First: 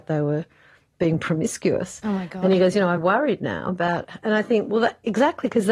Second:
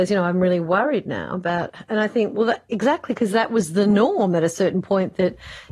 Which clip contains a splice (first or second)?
first